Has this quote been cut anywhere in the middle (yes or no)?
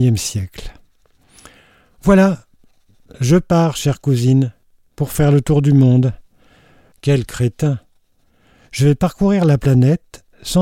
yes